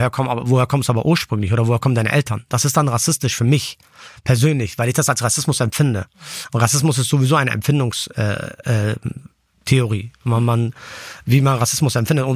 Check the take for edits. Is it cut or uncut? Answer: uncut